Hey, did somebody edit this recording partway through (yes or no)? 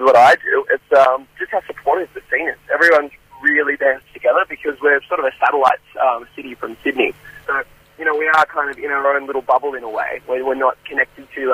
no